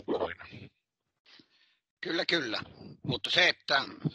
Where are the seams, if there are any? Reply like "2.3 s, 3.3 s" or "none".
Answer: 3.0 s